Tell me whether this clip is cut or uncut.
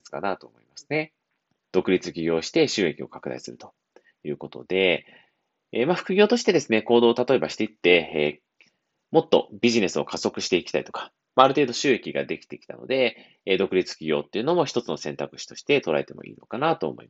cut